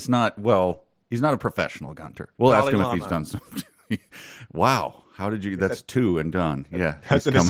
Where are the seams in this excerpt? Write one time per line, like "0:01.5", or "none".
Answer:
0:02.3